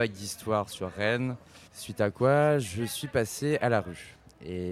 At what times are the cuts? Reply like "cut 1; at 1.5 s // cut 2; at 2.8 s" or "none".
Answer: cut 1; at 1.7 s